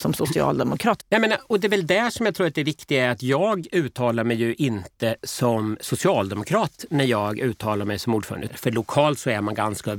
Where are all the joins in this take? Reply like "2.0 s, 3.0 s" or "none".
1.0 s, 8.5 s